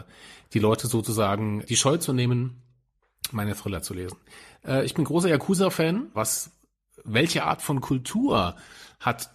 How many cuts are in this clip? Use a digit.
2